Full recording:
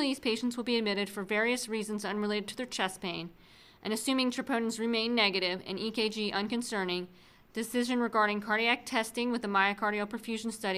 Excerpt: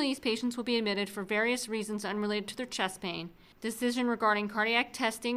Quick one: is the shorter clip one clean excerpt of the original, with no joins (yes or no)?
no